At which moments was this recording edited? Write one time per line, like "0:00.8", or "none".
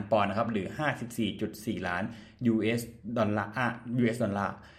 none